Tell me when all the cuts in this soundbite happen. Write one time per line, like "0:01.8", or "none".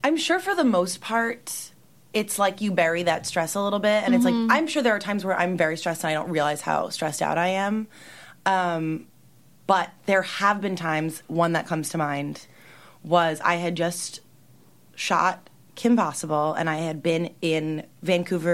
none